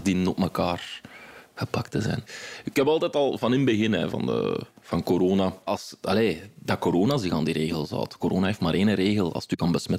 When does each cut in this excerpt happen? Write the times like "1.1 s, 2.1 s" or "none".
4.1 s, 5.7 s